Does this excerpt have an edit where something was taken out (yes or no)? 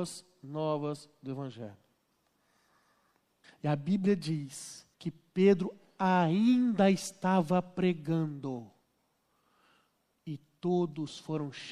yes